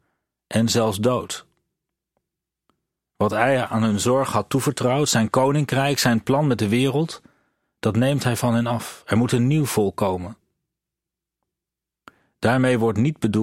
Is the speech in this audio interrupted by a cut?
no; 0 cuts

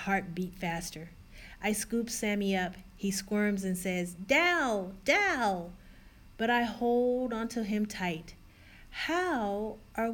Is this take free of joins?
yes; 0 cuts

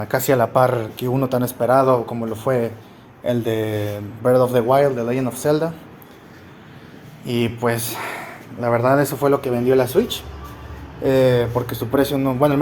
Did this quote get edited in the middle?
no; 0 cuts

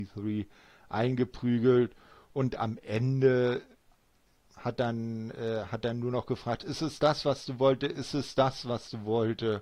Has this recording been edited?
no; 0 cuts

